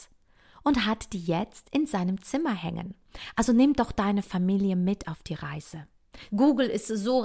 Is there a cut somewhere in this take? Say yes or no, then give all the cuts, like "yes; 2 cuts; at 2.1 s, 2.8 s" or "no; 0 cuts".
yes; 1 cut; at 6.3 s